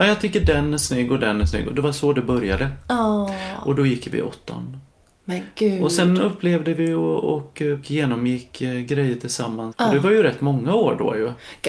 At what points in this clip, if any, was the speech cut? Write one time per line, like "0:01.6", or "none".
0:07.8
0:09.7